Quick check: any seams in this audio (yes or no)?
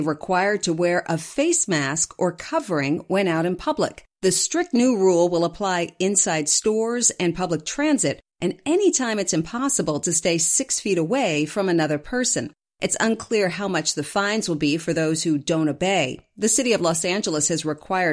no